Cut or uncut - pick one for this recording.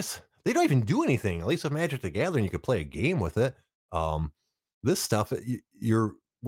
uncut